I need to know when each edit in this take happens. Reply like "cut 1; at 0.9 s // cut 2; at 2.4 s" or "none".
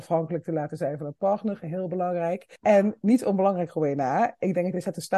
cut 1; at 2.6 s

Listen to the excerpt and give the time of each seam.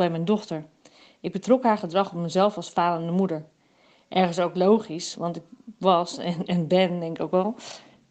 none

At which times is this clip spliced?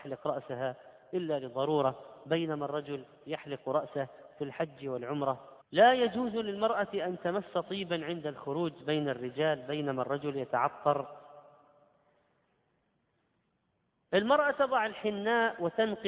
cut 1; at 5.6 s

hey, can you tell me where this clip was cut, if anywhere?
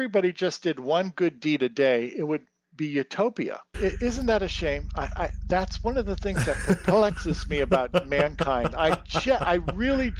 cut 1; at 3.7 s

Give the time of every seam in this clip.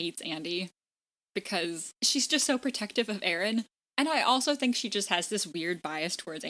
cut 1; at 1.2 s

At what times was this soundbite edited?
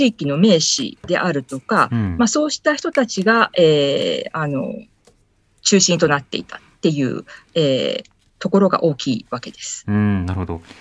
none

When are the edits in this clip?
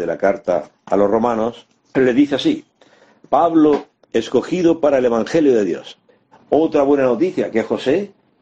cut 1; at 1.9 s // cut 2; at 4.0 s // cut 3; at 6.3 s

